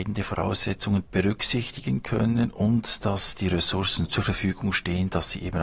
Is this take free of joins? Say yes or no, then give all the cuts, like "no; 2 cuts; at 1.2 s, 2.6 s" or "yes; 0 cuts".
no; 2 cuts; at 1.1 s, 4.1 s